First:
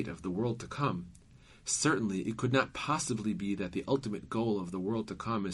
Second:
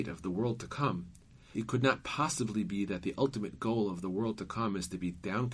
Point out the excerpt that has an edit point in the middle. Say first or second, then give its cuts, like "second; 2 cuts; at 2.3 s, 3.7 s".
second; 1 cut; at 1.5 s